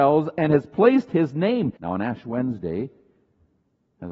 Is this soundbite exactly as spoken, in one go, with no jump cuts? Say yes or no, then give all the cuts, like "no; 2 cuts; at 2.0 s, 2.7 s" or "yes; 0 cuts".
no; 1 cut; at 1.8 s